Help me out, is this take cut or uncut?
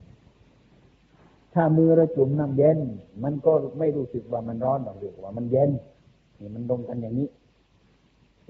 uncut